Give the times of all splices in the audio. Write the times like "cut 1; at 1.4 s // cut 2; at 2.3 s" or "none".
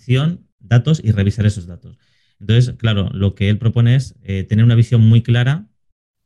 none